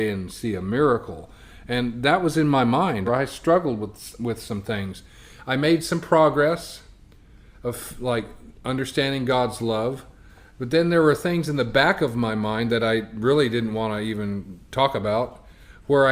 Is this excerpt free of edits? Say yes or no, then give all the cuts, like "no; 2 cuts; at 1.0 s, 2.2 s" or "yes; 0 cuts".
no; 1 cut; at 3.1 s